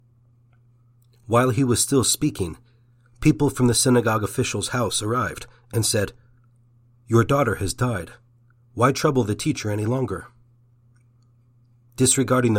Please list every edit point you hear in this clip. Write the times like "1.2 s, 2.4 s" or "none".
none